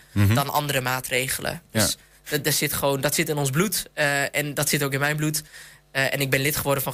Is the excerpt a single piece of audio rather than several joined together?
yes; 0 cuts

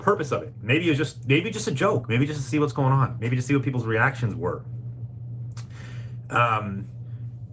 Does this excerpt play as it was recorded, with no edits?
yes; 0 cuts

